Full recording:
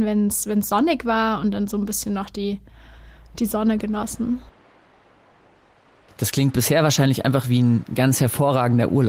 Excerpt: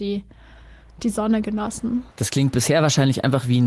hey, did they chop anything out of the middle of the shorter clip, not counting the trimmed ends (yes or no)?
yes